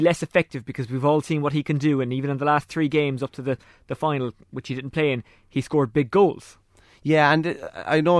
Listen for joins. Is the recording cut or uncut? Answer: uncut